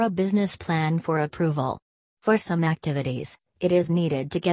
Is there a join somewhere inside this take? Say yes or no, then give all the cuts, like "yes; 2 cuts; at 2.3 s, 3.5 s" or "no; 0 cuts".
no; 0 cuts